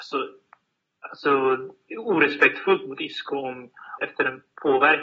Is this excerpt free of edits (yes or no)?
no